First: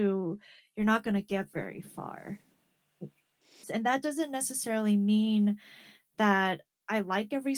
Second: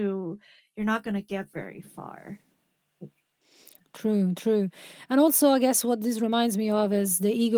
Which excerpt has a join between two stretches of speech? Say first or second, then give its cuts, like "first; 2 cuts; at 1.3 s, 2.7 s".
first; 1 cut; at 3.6 s